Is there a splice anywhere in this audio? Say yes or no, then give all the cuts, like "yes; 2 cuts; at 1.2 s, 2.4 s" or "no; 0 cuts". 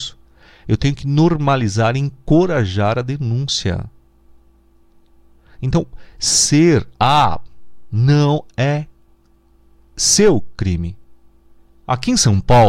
no; 0 cuts